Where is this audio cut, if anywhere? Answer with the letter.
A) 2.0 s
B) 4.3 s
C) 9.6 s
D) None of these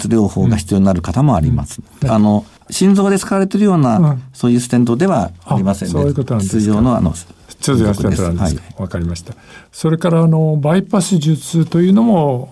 A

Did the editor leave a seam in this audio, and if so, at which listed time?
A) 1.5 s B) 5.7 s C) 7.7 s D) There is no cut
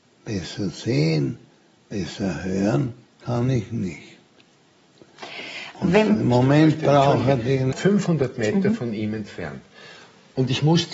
C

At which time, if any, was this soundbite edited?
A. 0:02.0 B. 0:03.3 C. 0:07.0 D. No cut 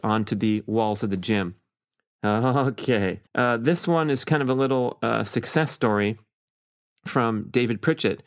B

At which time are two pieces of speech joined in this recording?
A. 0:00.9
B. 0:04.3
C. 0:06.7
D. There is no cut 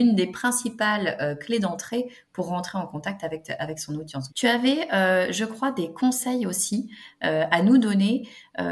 B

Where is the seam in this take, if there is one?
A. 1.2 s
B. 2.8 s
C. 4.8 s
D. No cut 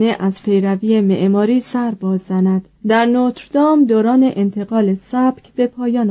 B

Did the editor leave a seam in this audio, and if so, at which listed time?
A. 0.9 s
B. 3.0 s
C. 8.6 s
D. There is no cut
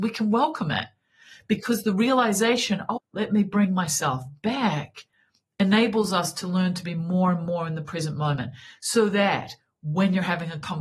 B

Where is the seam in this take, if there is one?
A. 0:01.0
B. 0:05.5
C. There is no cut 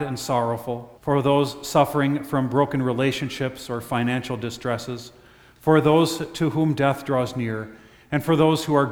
A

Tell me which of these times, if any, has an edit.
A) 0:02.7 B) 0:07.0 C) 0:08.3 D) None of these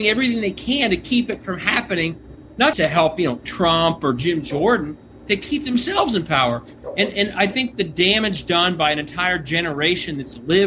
A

